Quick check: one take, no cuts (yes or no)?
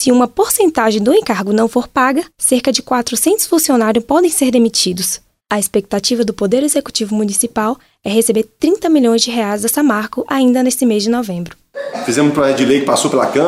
no